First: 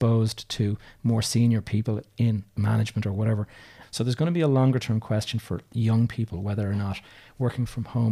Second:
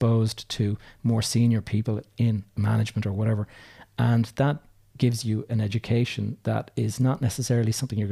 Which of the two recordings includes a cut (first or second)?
first